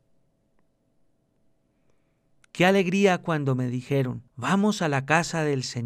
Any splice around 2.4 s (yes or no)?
no